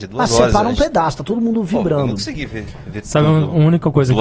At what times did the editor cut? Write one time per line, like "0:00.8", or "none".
none